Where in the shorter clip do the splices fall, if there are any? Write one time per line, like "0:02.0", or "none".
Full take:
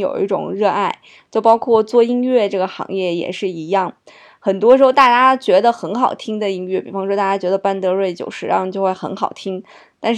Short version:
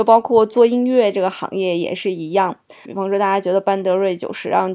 0:02.9